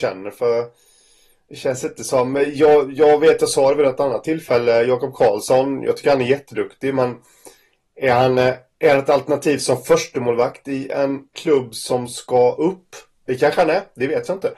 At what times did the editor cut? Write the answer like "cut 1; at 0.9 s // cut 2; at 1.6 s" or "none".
none